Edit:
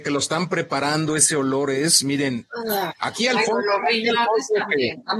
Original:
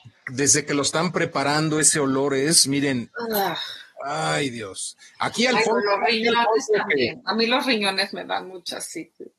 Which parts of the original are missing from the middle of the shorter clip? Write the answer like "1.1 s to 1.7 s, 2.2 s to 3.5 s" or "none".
3.6 s to 5.1 s